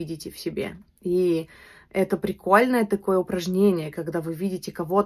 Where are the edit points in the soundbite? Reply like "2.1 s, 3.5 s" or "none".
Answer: none